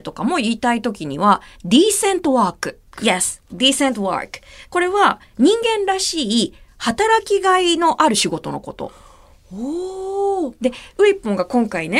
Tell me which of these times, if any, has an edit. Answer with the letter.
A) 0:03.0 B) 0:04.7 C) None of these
A